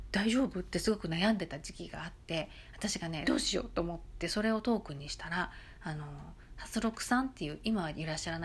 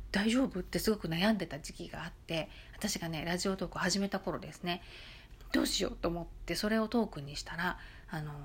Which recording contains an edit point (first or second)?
first